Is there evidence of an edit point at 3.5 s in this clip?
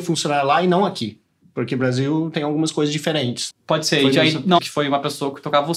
yes; 2 cuts; at 3.5 s, 4.6 s

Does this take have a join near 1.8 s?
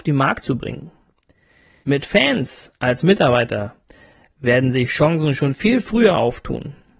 yes; 1 cut; at 1.8 s

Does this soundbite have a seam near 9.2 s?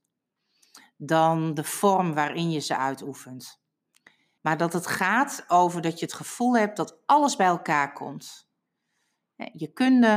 no; 1 cut; at 4.4 s

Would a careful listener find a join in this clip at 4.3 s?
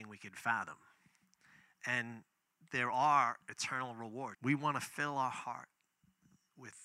yes; 1 cut; at 4.3 s

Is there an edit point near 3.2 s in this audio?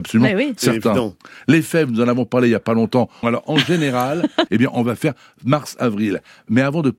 yes; 2 cuts; at 3.2 s, 4.5 s

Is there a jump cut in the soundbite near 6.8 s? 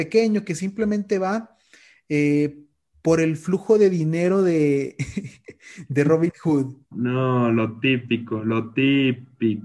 yes; 1 cut; at 6.8 s

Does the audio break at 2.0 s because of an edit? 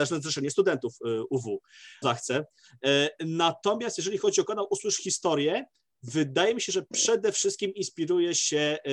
yes; 1 cut; at 2.0 s

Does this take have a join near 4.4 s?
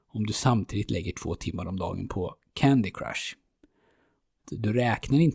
yes; 1 cut; at 4.4 s

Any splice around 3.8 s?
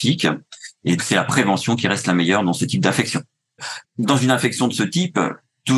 yes; 2 cuts; at 1.0 s, 3.8 s

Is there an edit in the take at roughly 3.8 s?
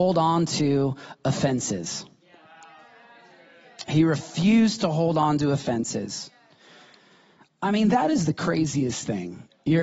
no; 0 cuts

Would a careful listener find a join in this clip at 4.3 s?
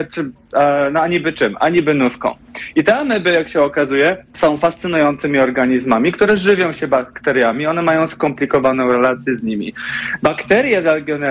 yes; 1 cut; at 4.3 s

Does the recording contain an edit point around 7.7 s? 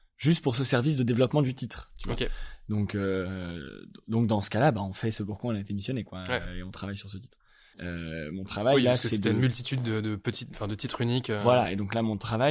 yes; 1 cut; at 7.7 s

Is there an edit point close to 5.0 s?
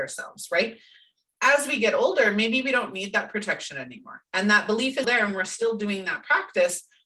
yes; 1 cut; at 5.0 s

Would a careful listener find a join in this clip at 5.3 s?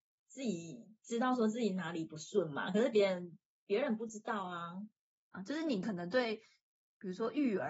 yes; 1 cut; at 5.3 s

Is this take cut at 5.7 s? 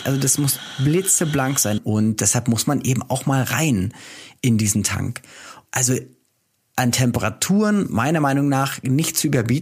yes; 2 cuts; at 1.8 s, 5.7 s

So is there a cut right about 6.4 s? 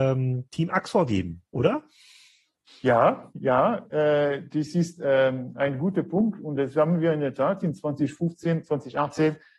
no; 0 cuts

